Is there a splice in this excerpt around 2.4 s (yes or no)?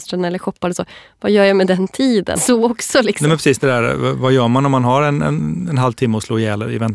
yes